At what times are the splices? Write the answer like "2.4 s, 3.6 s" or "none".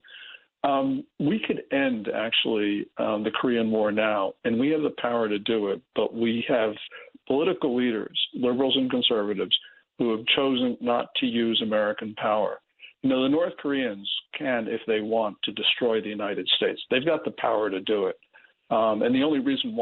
8.3 s